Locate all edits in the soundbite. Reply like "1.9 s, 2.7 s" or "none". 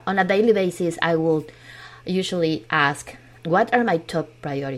3.4 s